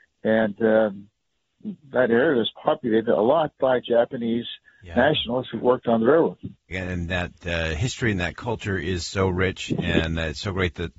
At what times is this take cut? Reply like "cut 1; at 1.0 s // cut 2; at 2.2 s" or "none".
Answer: cut 1; at 6.7 s

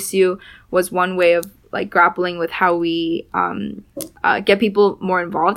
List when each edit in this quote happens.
cut 1; at 4.2 s

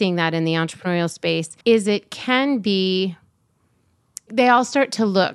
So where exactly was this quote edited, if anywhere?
cut 1; at 1.6 s // cut 2; at 4.3 s

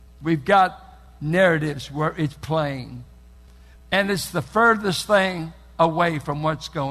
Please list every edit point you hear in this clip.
cut 1; at 3.8 s

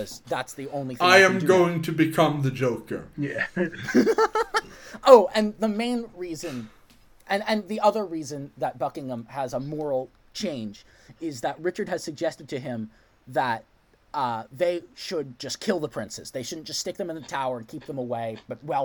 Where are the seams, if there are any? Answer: none

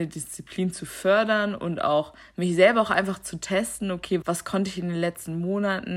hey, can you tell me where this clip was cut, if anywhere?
cut 1; at 4.2 s

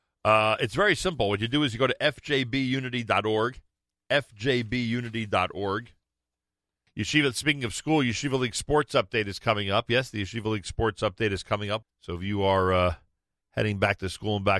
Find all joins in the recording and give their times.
cut 1; at 6.9 s // cut 2; at 11.8 s

